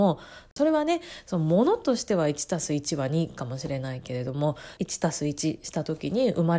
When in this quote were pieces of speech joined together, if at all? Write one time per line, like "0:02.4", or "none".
0:04.8